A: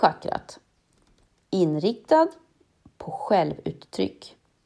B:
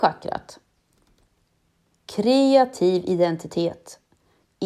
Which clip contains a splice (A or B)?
A